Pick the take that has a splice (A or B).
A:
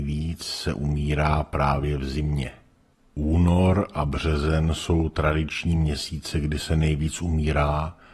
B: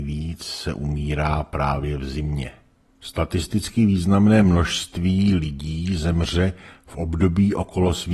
B